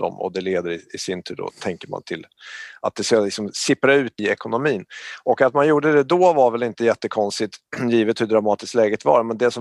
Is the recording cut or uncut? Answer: cut